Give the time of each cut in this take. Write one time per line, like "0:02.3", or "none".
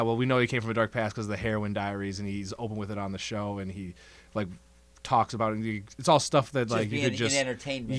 none